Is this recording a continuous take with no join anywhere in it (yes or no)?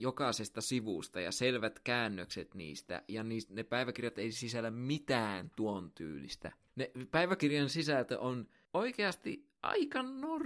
yes